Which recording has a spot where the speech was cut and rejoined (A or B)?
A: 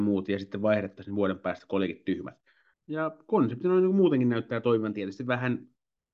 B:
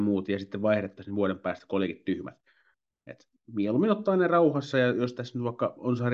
A